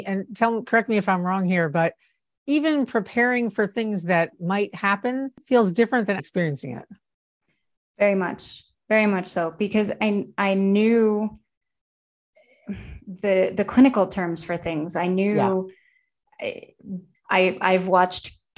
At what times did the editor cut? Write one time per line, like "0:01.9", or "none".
0:06.2
0:17.1